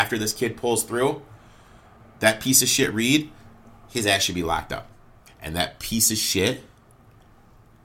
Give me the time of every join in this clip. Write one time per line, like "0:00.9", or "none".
0:05.3